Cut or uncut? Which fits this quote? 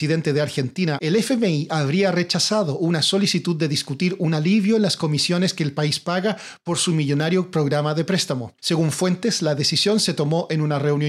cut